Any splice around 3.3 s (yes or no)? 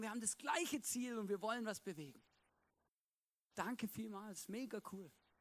no